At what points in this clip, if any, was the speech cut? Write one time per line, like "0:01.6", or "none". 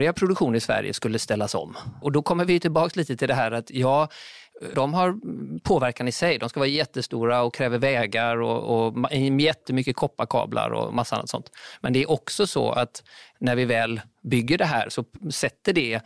0:02.0
0:04.7